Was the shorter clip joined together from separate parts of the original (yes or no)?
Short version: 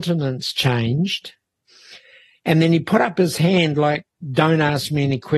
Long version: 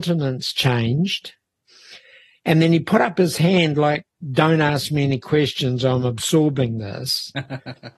no